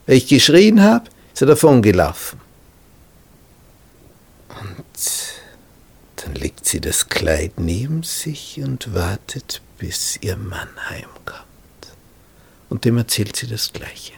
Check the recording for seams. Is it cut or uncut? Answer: uncut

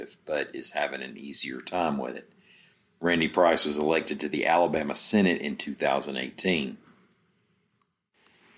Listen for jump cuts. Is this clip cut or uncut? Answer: uncut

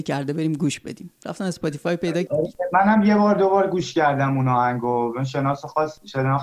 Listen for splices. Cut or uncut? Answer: cut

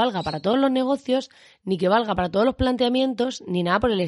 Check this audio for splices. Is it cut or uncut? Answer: uncut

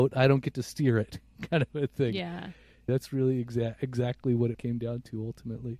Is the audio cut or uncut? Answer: cut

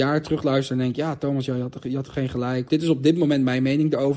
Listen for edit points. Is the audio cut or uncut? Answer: cut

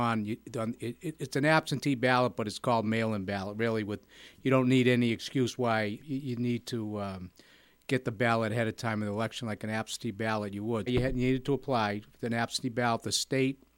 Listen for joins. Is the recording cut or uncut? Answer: cut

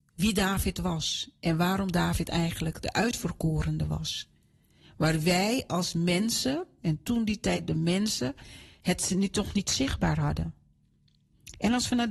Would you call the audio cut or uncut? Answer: uncut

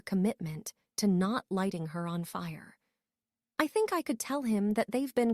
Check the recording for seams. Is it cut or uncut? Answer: uncut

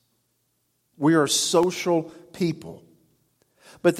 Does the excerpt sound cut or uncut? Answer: cut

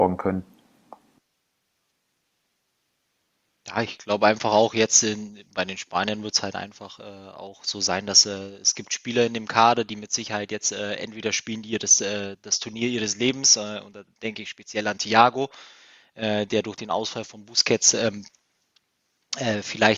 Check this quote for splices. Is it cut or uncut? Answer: uncut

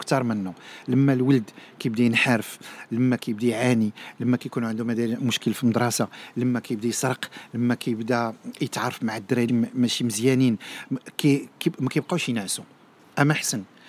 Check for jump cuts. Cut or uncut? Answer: cut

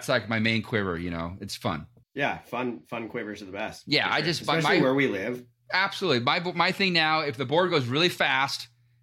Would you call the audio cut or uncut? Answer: cut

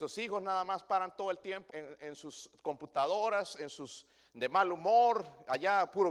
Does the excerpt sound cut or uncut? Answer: cut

